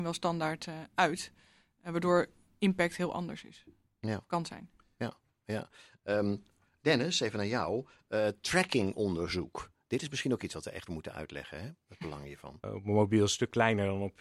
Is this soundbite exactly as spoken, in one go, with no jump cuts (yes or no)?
no